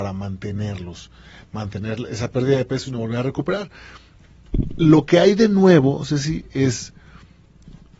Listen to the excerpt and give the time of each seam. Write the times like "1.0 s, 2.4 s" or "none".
none